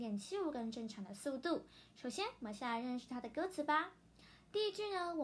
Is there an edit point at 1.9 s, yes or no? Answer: no